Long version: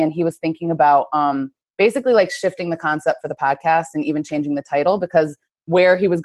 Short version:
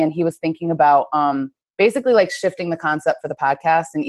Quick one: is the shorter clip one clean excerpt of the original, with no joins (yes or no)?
yes